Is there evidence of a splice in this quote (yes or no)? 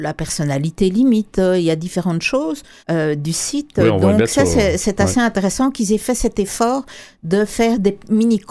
yes